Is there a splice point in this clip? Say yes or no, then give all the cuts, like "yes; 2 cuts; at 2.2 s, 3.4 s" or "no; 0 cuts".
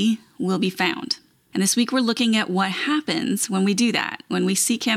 no; 0 cuts